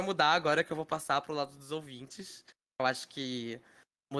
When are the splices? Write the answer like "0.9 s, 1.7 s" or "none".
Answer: 2.8 s